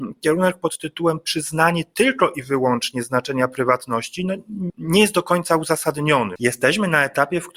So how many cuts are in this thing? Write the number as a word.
two